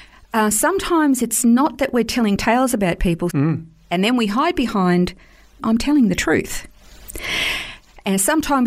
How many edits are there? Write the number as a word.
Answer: two